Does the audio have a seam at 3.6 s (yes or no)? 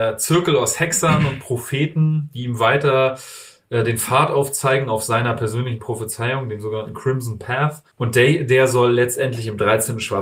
no